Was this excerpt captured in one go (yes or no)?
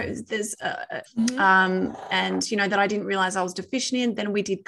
no